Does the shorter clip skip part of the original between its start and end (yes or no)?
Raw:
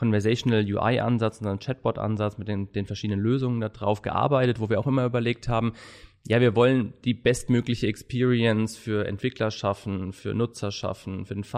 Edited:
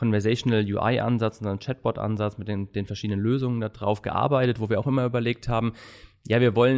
no